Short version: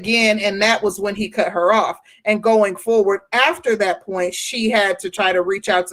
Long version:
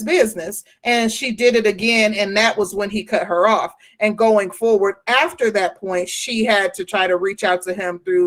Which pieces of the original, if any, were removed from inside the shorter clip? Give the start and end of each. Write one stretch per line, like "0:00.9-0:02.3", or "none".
none